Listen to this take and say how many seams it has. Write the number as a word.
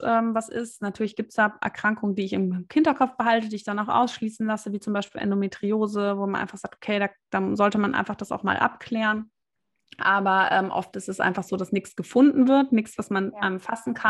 zero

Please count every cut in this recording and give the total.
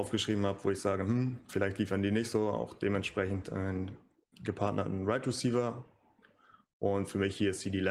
zero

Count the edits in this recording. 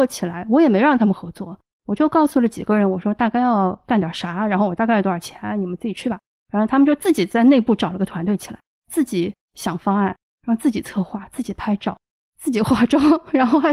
zero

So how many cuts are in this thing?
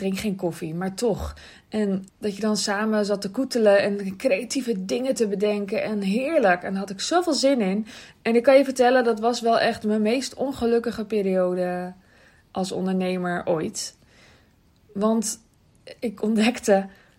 two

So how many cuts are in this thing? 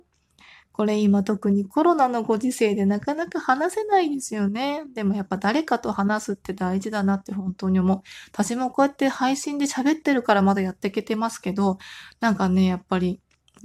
zero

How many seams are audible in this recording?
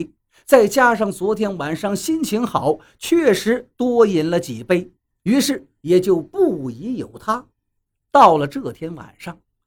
one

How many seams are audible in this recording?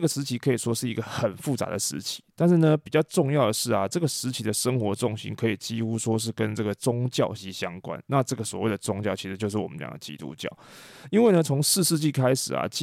one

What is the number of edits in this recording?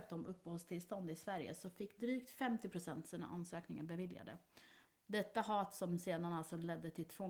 one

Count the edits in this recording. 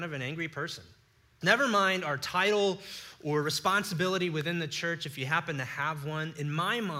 one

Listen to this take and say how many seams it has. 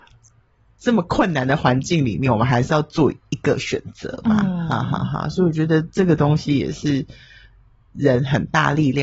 zero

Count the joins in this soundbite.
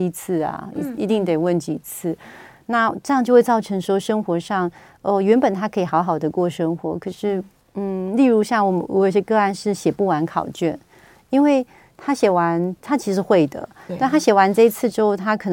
zero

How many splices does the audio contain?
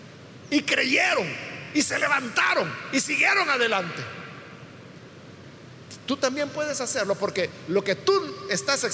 zero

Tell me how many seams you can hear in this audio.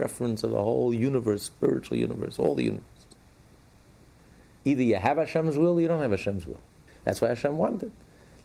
two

